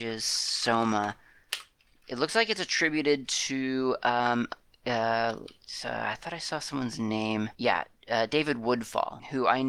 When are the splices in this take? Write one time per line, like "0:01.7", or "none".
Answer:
none